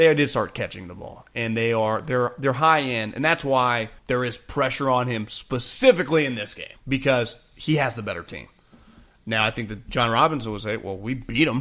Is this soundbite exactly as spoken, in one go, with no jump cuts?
no; 2 cuts; at 4.0 s, 6.8 s

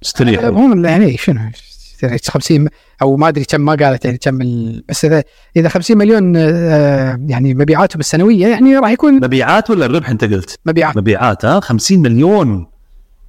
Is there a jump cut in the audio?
no; 0 cuts

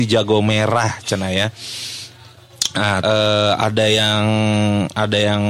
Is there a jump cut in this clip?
yes; 1 cut; at 3.0 s

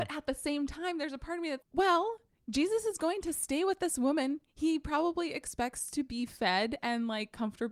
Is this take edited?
yes; 1 cut; at 1.6 s

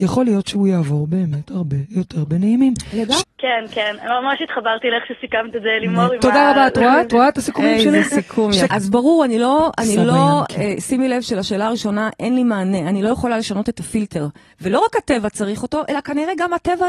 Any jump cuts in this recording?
yes; 3 cuts; at 3.2 s, 8.7 s, 14.5 s

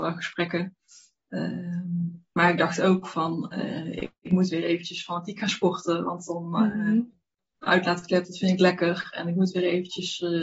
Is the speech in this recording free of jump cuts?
yes; 0 cuts

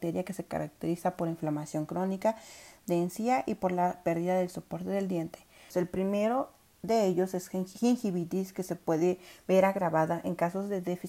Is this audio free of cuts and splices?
no; 1 cut; at 5.7 s

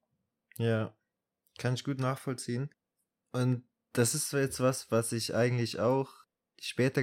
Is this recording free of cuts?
yes; 0 cuts

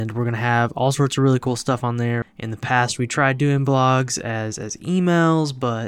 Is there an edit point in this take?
yes; 1 cut; at 2.2 s

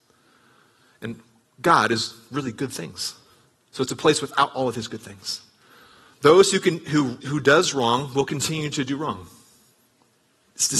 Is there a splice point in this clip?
yes; 2 cuts; at 6.1 s, 7.2 s

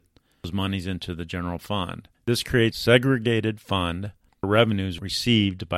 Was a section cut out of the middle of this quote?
no; 0 cuts

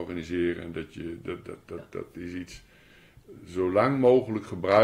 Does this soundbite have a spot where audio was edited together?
no; 0 cuts

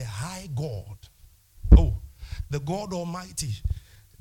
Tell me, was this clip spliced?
no; 0 cuts

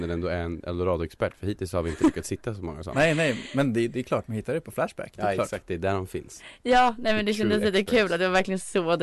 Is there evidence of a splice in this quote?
no; 0 cuts

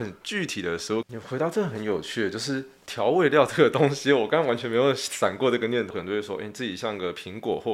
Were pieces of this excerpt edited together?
yes; 2 cuts; at 1.0 s, 5.9 s

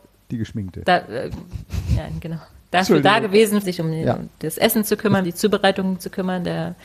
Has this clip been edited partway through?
yes; 2 cuts; at 3.6 s, 5.2 s

